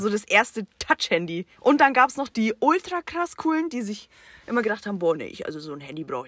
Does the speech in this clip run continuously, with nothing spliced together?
no; 1 cut; at 1.5 s

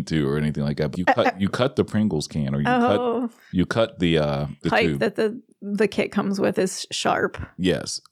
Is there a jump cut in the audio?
yes; 2 cuts; at 0.9 s, 4.6 s

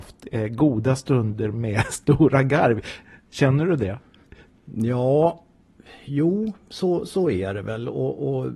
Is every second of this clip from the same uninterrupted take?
yes; 0 cuts

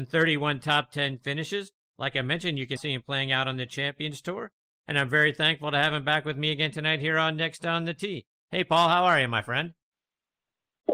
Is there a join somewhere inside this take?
yes; 1 cut; at 2.8 s

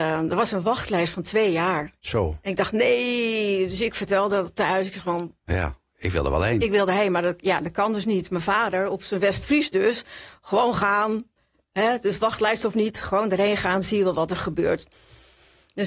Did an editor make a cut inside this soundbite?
no; 0 cuts

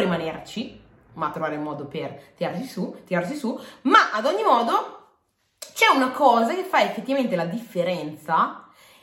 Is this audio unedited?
yes; 0 cuts

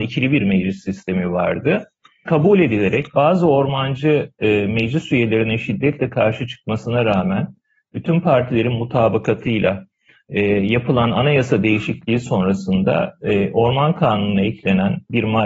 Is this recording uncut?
yes; 0 cuts

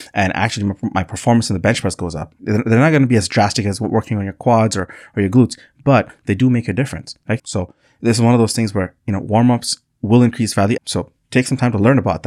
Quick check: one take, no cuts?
no; 3 cuts; at 2.4 s, 7.4 s, 10.8 s

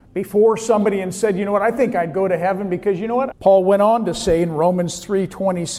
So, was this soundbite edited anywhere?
yes; 1 cut; at 3.3 s

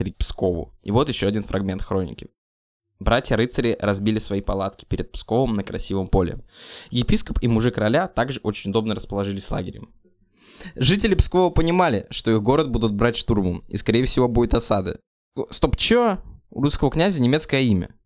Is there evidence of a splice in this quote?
no; 0 cuts

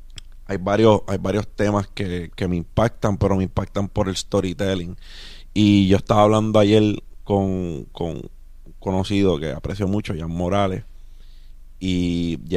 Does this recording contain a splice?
yes; 1 cut; at 2.3 s

